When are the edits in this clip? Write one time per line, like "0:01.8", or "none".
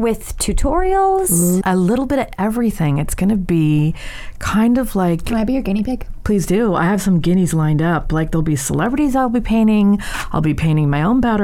0:01.6